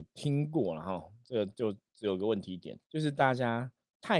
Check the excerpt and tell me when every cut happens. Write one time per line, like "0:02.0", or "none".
0:02.8